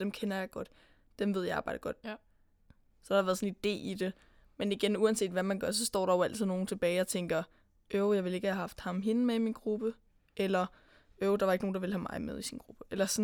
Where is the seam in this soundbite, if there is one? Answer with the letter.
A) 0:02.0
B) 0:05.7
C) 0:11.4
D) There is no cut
A